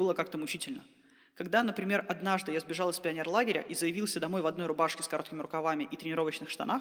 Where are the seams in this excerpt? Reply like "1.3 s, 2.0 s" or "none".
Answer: none

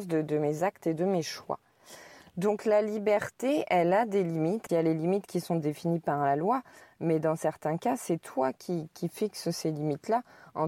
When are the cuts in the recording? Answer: 4.7 s

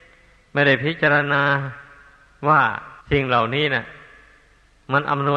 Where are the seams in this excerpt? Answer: 3.0 s

